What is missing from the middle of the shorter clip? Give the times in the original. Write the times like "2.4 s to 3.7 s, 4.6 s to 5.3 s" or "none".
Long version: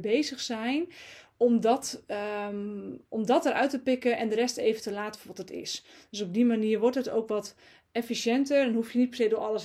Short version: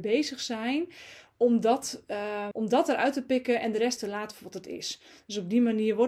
2.5 s to 3.1 s, 4.5 s to 4.8 s